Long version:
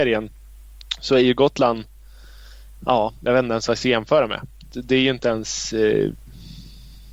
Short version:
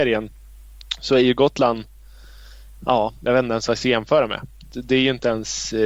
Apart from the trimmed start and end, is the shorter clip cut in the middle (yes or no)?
no